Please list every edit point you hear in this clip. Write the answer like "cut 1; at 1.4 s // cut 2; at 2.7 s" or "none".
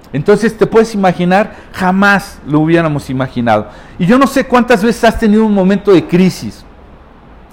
none